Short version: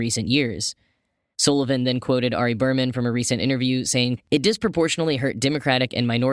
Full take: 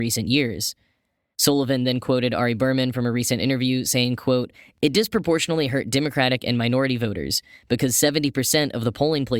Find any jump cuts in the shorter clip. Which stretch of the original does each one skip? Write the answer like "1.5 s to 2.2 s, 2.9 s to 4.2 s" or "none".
4.2 s to 4.7 s